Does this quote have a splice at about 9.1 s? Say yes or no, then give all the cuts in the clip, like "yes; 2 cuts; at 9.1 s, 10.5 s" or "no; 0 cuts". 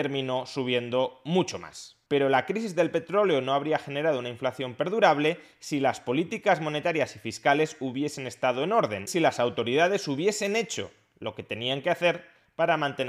yes; 2 cuts; at 2.1 s, 9.1 s